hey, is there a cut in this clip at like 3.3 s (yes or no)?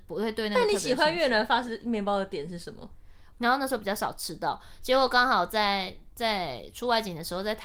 yes